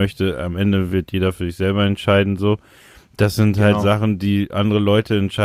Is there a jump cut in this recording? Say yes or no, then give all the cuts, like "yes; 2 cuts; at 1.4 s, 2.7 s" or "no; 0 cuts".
no; 0 cuts